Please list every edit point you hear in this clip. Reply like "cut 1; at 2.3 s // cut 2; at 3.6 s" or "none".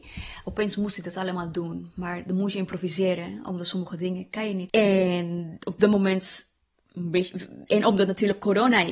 cut 1; at 4.7 s